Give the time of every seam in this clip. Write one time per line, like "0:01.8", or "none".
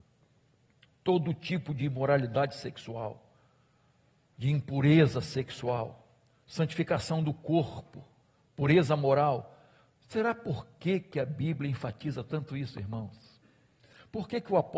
none

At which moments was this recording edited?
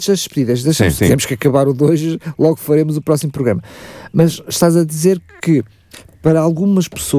0:01.0

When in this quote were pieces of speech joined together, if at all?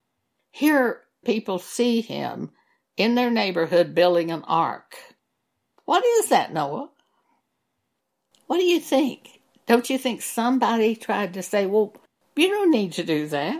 0:01.2

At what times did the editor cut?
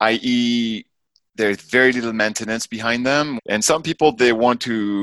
0:03.4

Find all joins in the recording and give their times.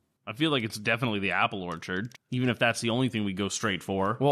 0:02.1

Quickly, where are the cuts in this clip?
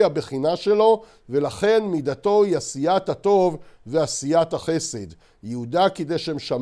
none

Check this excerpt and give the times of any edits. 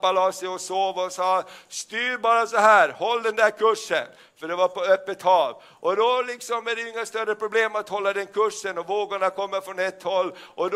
none

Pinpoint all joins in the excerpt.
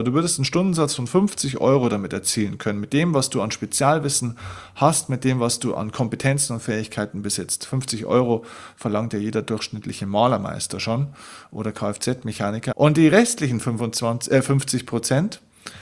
0:12.7

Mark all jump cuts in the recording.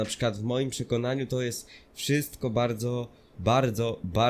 none

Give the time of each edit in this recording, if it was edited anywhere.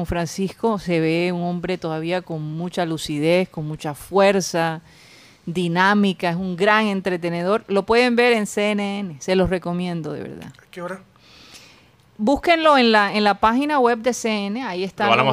none

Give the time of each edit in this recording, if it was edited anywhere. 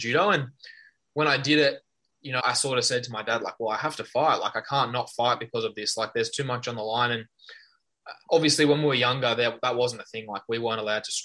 0:02.4

